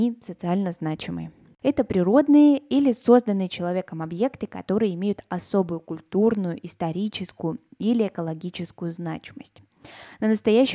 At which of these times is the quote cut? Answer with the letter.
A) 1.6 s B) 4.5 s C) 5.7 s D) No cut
A